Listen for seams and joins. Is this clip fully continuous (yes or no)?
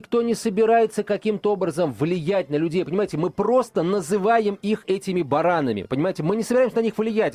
yes